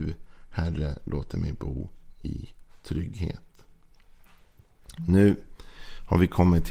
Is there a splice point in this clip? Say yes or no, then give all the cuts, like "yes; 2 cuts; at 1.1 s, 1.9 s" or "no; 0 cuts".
no; 0 cuts